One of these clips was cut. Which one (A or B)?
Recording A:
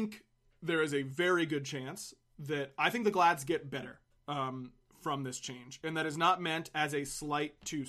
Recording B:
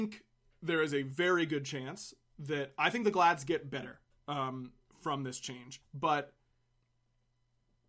B